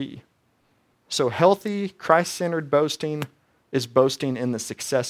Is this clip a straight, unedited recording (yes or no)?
no